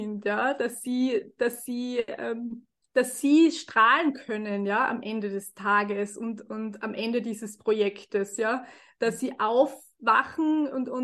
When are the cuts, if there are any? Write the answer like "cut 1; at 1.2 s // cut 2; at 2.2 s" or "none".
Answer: none

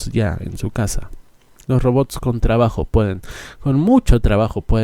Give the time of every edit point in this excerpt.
none

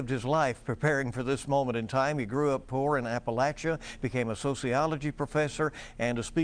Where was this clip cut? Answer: none

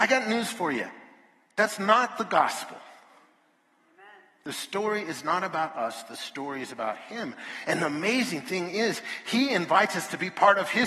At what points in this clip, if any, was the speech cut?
none

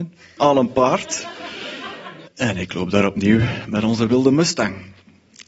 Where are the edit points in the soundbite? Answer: cut 1; at 2.3 s

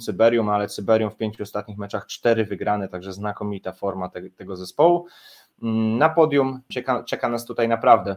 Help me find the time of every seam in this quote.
cut 1; at 6.7 s

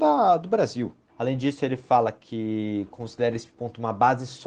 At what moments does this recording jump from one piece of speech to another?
cut 1; at 1.1 s

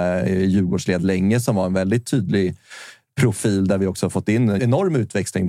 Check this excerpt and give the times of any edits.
cut 1; at 4.6 s

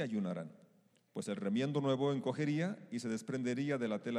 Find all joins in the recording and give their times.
cut 1; at 0.9 s

